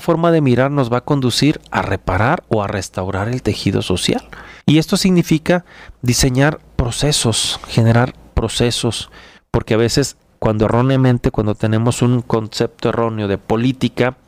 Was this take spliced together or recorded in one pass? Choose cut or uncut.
cut